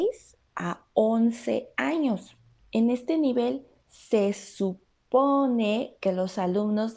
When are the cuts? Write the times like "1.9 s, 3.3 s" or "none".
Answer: none